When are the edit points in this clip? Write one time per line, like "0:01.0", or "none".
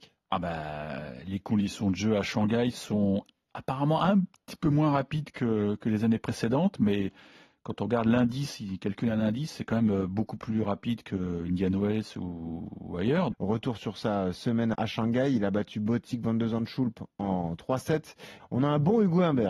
0:13.3
0:14.7
0:18.4